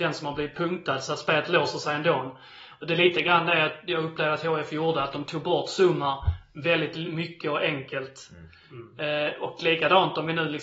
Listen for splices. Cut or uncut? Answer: uncut